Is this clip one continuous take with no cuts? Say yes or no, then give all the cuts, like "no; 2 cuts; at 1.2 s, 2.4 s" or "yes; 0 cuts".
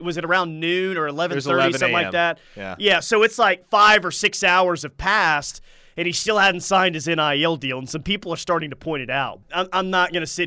no; 1 cut; at 9.4 s